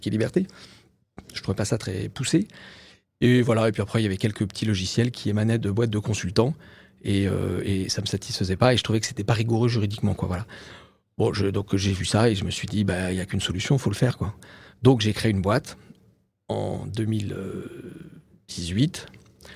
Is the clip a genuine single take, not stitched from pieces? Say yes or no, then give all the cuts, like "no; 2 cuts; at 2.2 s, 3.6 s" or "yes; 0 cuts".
yes; 0 cuts